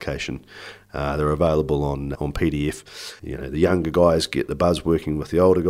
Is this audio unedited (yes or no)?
no